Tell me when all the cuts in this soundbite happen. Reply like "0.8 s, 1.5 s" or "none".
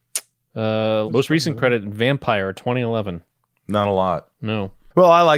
1.1 s, 3.5 s